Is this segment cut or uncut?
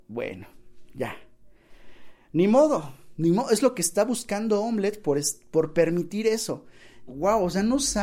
cut